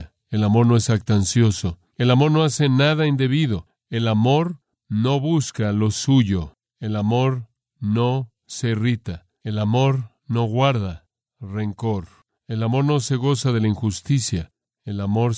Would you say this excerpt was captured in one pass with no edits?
no; 1 cut; at 1.9 s

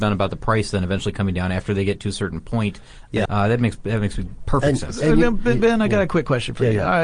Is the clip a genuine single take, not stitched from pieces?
no; 1 cut; at 3.3 s

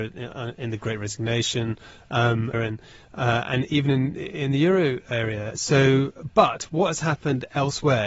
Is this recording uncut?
no; 1 cut; at 2.5 s

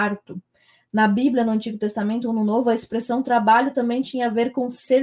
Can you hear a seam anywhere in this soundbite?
no; 0 cuts

